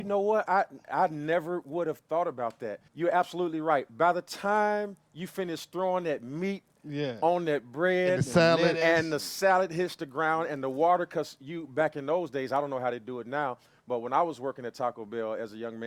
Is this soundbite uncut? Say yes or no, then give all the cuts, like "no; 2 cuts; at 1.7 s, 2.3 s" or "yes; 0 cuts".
no; 1 cut; at 2.9 s